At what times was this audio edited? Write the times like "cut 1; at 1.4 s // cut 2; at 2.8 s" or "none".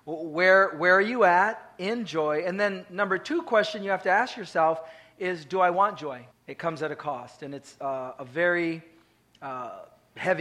cut 1; at 6.3 s